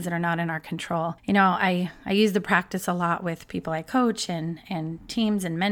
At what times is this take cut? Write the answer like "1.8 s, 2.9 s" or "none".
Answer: 1.2 s

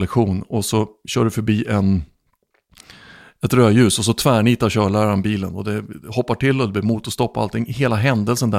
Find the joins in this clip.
none

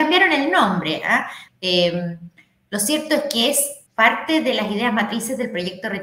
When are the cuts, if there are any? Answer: 1.5 s, 3.9 s

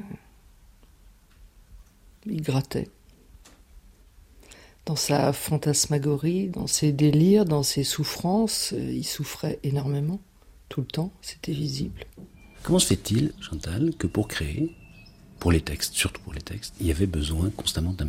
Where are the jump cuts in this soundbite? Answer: none

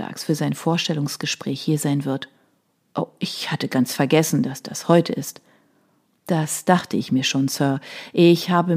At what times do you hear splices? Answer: 2.9 s

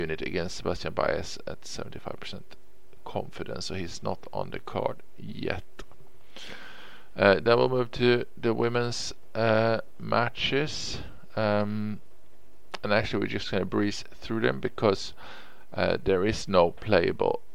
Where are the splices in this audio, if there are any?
none

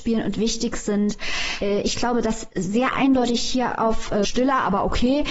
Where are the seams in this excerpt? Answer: 1.6 s, 4.2 s

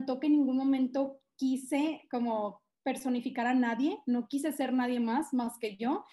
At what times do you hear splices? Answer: none

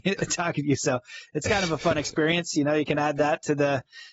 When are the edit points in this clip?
none

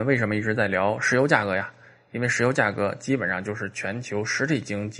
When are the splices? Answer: none

